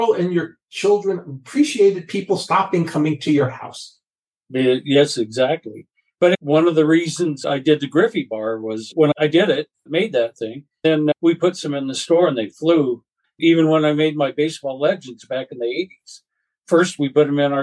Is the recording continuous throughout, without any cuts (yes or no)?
no